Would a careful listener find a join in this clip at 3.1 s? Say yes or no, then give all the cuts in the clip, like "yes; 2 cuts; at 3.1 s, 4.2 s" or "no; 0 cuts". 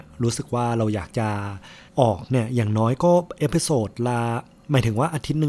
no; 1 cut; at 1.9 s